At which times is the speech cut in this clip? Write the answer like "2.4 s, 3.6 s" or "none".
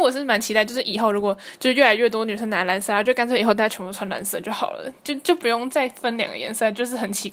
none

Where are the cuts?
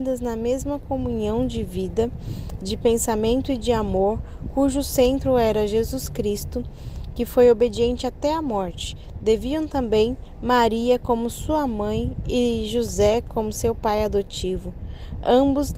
none

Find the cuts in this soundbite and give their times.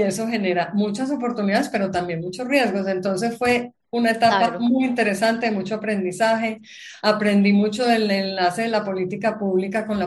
none

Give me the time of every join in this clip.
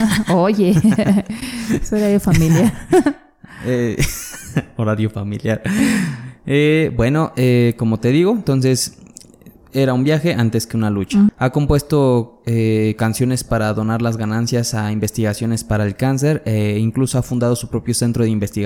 11.3 s

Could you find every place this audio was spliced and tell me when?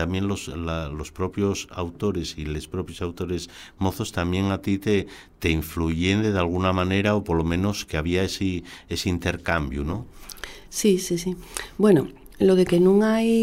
none

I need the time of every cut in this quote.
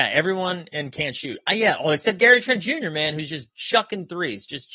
none

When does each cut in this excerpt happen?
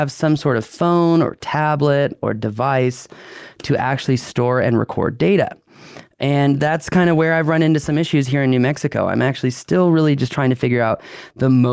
none

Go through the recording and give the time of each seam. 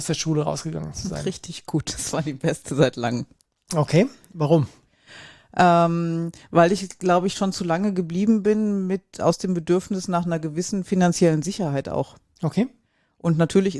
none

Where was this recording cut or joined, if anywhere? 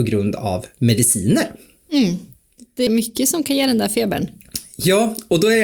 2.9 s

